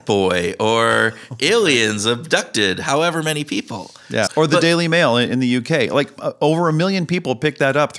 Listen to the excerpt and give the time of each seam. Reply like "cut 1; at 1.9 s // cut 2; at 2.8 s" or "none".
cut 1; at 4.3 s

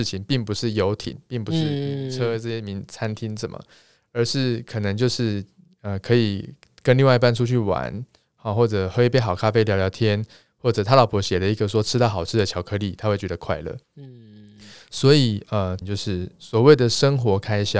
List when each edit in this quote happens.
cut 1; at 13.8 s // cut 2; at 15.8 s

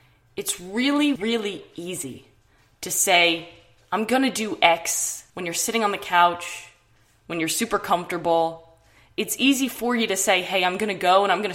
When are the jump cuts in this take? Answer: cut 1; at 1.2 s // cut 2; at 5.3 s

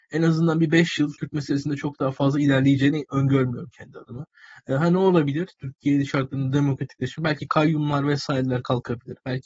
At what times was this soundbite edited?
none

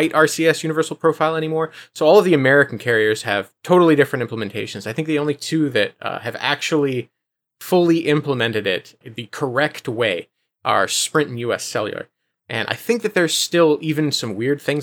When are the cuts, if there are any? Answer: cut 1; at 9.0 s

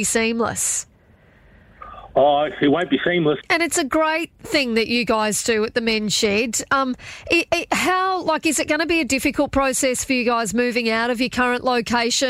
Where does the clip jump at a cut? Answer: cut 1; at 3.4 s

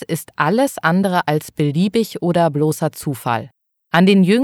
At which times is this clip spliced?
none

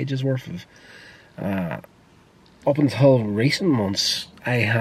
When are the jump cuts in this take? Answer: cut 1; at 2.6 s

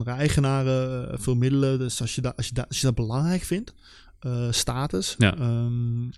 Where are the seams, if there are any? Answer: none

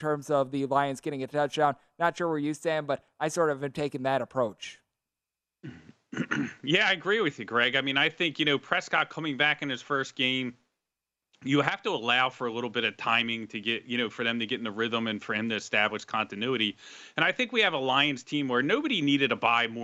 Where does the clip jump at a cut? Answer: none

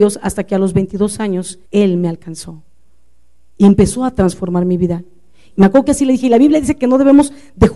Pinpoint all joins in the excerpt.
cut 1; at 1.6 s // cut 2; at 5.5 s

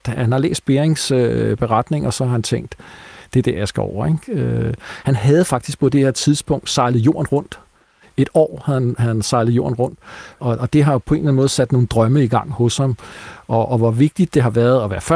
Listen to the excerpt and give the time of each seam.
cut 1; at 10.4 s

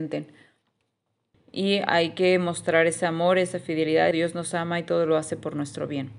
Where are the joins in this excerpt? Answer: cut 1; at 1.3 s // cut 2; at 4.1 s

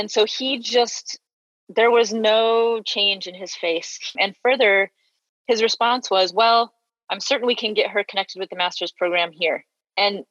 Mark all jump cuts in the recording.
cut 1; at 4.1 s

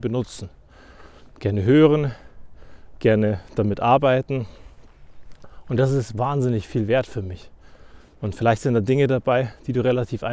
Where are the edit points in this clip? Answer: cut 1; at 8.1 s

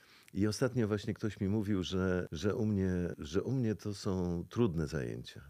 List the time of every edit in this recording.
none

